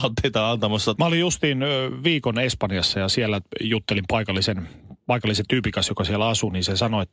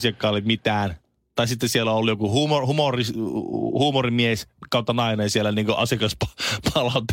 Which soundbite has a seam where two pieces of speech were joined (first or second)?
first